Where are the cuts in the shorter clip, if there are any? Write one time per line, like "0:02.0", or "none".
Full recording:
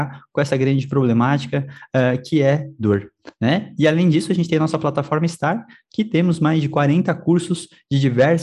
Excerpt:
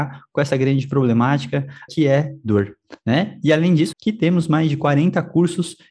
0:01.9
0:03.9